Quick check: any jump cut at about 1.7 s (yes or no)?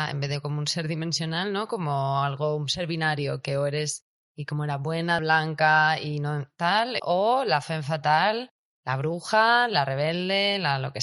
no